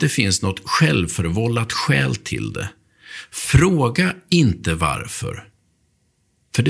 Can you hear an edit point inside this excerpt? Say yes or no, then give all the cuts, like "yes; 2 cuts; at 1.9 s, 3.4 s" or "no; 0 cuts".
no; 0 cuts